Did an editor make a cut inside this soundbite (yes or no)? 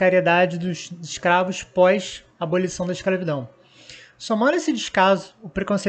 no